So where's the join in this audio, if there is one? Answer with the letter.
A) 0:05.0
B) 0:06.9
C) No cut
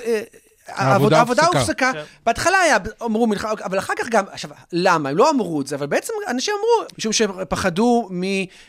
B